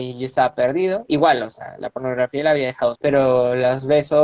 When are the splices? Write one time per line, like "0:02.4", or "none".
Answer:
0:02.9